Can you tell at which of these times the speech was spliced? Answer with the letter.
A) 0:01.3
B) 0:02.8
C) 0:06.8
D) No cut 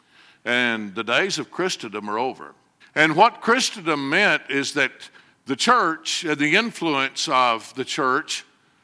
B